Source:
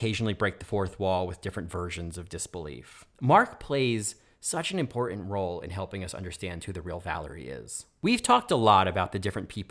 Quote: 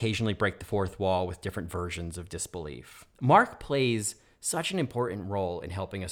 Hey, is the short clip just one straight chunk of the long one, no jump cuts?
yes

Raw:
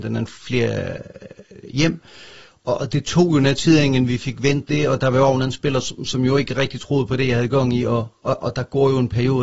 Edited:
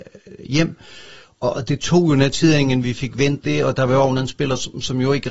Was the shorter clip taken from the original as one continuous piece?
yes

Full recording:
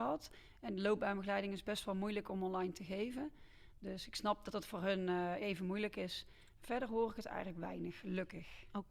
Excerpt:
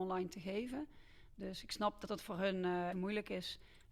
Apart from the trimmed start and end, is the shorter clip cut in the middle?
yes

